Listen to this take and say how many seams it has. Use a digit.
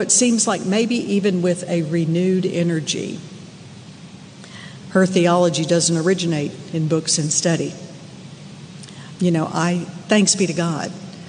2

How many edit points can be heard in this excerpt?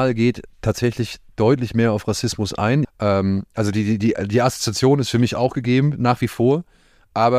1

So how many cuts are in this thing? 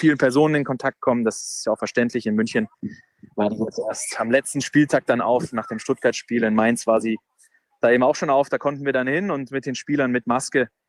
0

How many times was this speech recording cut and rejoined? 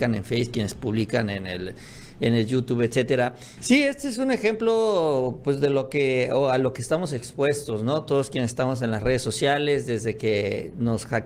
1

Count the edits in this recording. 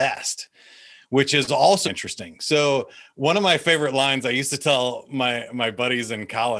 1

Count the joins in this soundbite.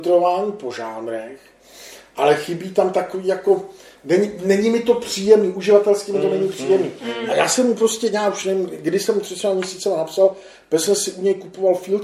0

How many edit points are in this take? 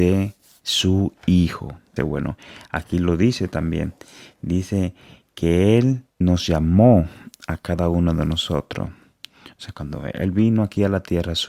2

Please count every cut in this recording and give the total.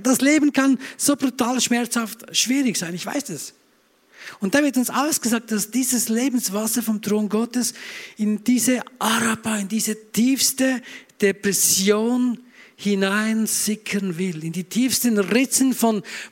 0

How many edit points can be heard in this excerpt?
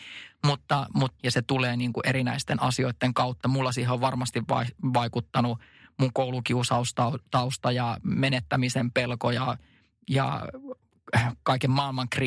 1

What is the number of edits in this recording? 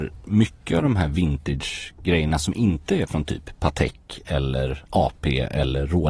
0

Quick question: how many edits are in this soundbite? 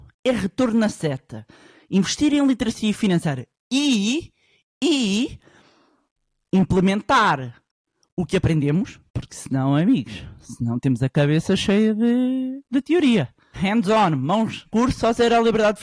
2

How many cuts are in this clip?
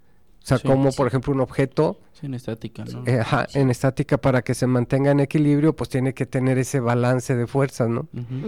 0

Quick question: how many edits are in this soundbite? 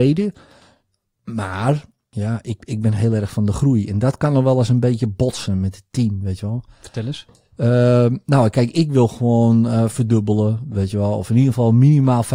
0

